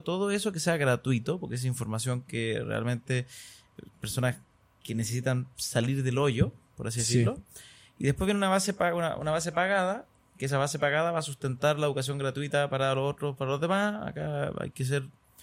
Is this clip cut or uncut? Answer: uncut